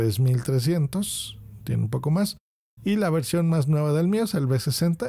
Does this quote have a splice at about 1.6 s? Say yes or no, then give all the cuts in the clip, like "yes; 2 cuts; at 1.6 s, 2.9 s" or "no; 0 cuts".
no; 0 cuts